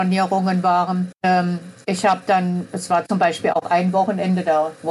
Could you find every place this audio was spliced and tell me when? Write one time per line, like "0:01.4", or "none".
0:01.1